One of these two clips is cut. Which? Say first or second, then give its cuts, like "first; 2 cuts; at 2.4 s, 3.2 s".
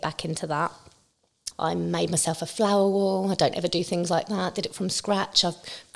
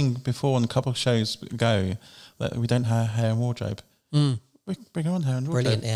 first; 1 cut; at 1.5 s